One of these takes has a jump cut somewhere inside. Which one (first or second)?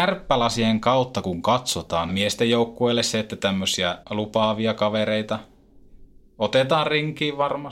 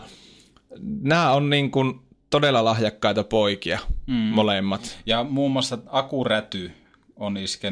first